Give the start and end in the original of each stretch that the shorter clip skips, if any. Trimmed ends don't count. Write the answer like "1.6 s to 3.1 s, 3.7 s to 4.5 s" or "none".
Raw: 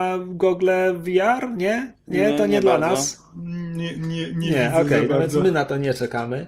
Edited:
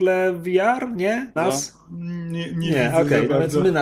2.0 s to 2.8 s, 3.9 s to 4.3 s

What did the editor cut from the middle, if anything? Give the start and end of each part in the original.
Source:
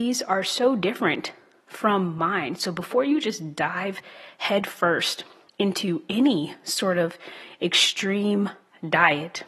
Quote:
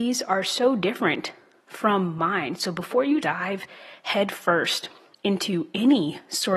3.2 s to 3.5 s

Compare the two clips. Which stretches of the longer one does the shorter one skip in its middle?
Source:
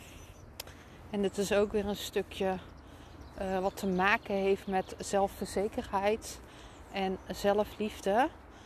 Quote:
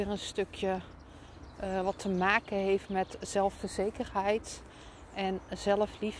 none

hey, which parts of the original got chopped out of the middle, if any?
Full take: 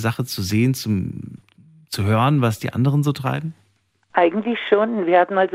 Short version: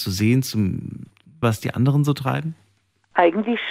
1.7 s to 2.4 s

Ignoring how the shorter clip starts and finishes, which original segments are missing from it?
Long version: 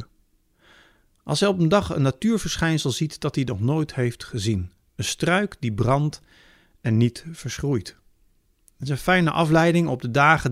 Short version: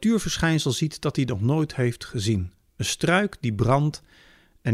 none

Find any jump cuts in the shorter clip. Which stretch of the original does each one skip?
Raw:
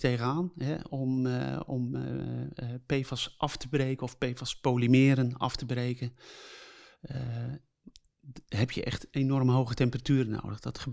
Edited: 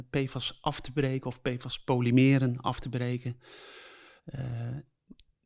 none

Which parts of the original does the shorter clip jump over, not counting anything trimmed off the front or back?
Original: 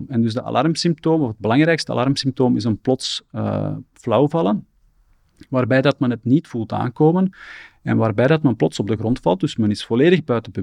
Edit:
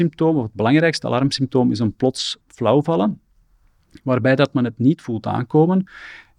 3.3 s to 3.9 s

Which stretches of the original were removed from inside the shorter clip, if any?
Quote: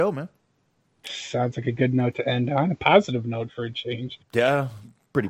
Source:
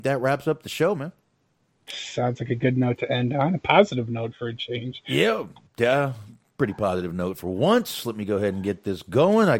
5.0 s to 5.6 s

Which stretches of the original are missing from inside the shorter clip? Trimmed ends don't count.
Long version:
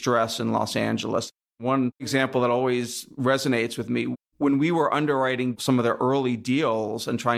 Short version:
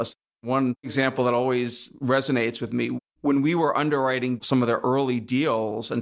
none

